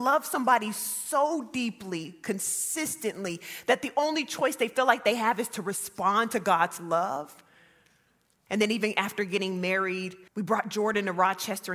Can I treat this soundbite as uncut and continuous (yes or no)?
no